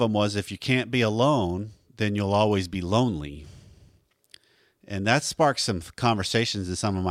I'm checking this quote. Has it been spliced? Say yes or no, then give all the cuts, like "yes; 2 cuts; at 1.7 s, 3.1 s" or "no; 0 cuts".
no; 0 cuts